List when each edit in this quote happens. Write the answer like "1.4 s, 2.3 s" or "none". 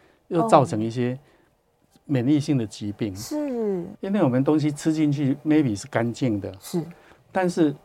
4.0 s

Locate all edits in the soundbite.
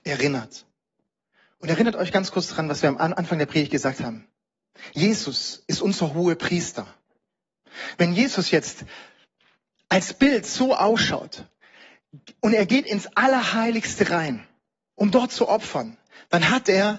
none

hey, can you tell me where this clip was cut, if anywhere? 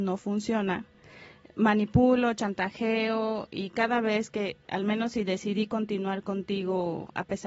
none

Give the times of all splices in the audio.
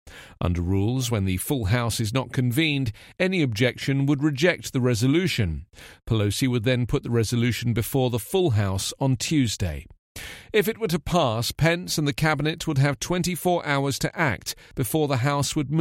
none

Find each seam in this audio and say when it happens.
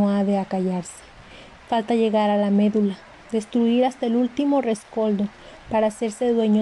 none

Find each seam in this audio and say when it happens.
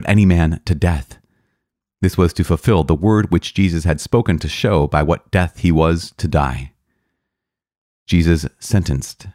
none

